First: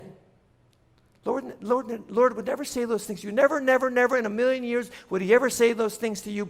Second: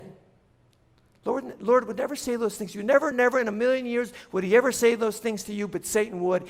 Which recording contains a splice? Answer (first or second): second